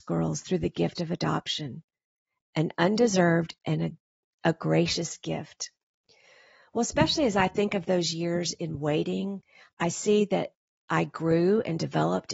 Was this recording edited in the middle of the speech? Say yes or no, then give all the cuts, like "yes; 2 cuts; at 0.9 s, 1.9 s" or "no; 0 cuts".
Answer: no; 0 cuts